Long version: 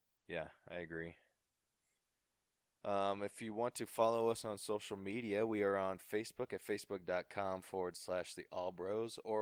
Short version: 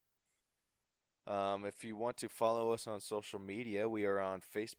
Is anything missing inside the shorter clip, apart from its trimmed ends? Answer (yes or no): no